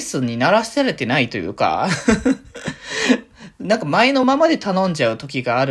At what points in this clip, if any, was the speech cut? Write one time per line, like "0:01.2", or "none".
none